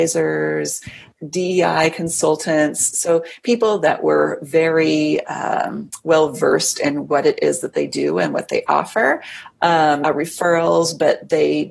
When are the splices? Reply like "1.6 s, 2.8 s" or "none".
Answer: 10.0 s